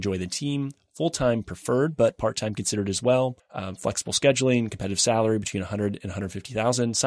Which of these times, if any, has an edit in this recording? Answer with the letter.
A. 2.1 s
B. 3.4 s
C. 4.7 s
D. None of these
B